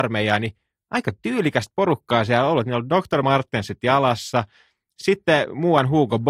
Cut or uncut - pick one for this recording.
uncut